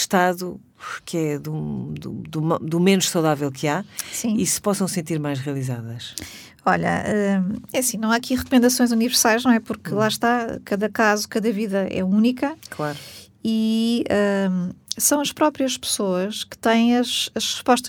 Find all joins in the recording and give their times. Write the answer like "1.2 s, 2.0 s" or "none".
none